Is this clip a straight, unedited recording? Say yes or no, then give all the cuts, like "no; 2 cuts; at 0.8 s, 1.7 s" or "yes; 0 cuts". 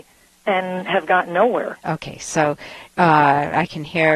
yes; 0 cuts